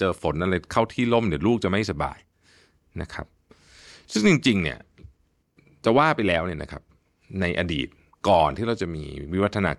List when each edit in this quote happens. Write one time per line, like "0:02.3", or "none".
none